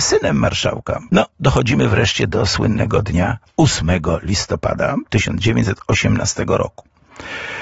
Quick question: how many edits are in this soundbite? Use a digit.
2